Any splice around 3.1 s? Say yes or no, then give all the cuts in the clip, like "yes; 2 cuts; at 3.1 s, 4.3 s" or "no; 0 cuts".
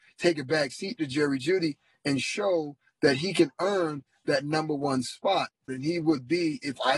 no; 1 cut; at 5.7 s